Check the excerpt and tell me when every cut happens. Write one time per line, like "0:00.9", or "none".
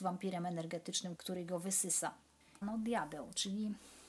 0:01.2
0:02.6